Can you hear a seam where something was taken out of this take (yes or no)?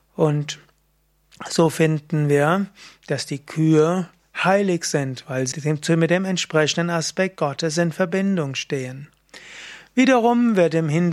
yes